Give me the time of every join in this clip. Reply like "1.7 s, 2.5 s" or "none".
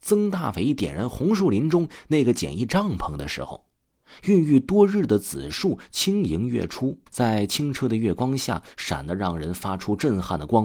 4.2 s, 7.1 s